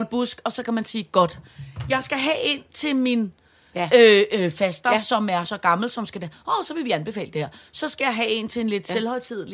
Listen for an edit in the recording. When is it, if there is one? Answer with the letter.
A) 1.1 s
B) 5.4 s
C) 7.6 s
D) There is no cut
B